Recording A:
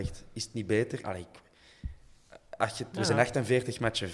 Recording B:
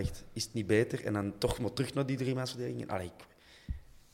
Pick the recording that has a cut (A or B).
A